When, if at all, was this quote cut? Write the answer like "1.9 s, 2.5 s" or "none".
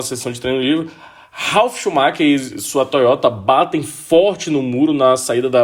none